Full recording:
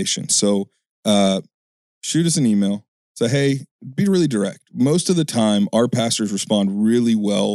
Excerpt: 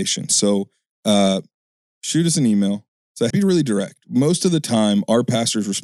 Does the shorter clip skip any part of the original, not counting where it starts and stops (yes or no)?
yes